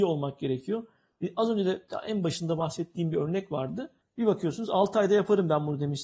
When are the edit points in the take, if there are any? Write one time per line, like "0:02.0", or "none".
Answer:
0:04.0